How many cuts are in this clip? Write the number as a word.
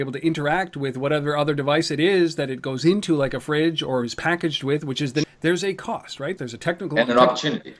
two